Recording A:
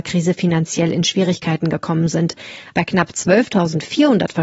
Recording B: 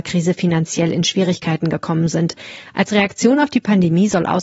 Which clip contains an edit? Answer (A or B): A